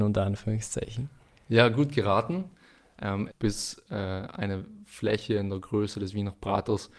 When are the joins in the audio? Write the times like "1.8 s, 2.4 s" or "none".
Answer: 3.3 s